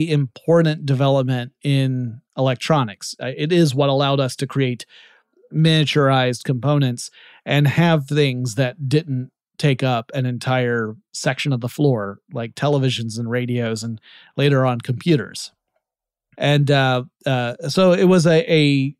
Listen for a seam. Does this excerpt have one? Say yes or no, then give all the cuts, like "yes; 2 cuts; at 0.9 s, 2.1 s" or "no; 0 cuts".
yes; 1 cut; at 16.3 s